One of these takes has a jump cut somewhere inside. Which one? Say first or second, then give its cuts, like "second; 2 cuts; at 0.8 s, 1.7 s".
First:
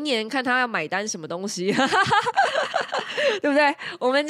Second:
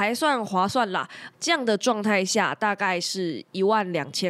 second; 1 cut; at 1.3 s